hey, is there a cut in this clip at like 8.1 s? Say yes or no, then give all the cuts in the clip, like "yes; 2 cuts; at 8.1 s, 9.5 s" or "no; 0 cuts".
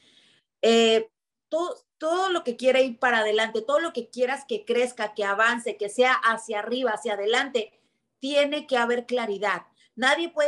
no; 1 cut; at 1.4 s